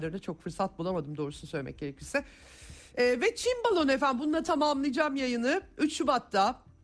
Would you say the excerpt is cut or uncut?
uncut